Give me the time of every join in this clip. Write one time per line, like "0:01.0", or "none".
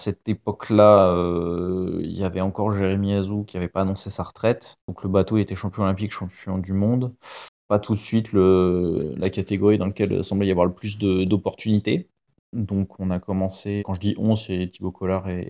0:13.8